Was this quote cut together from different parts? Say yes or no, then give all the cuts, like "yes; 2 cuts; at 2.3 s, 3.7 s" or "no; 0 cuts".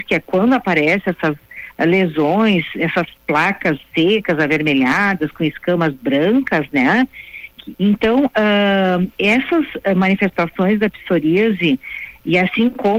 yes; 2 cuts; at 7.7 s, 9.2 s